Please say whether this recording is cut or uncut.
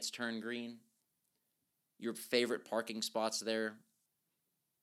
uncut